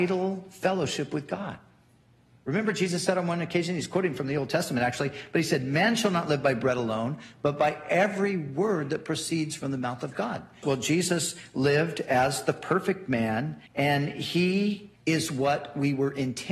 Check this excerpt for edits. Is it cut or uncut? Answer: cut